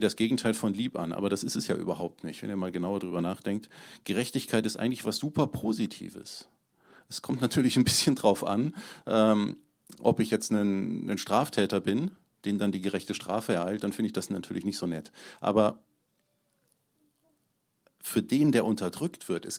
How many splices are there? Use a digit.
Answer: 0